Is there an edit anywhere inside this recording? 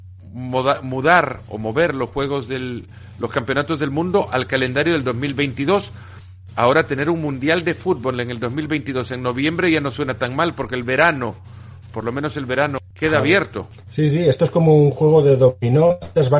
no; 0 cuts

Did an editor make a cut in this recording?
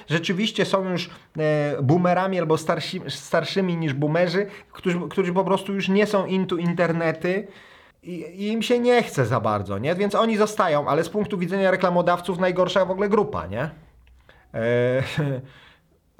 no; 0 cuts

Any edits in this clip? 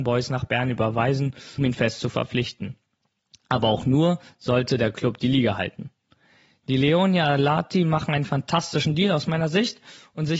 yes; 1 cut; at 1.6 s

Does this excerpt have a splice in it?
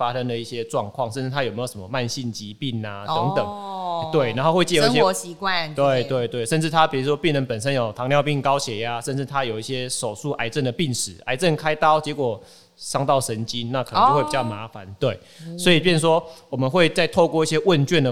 no; 0 cuts

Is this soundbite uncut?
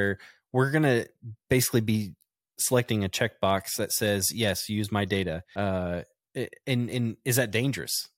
yes; 0 cuts

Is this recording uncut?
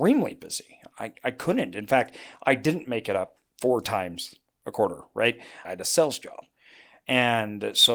no; 1 cut; at 5.6 s

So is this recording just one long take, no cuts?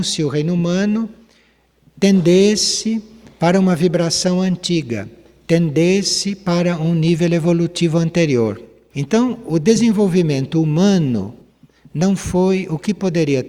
no; 1 cut; at 8.9 s

